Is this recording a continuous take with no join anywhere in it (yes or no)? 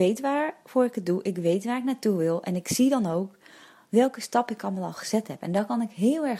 yes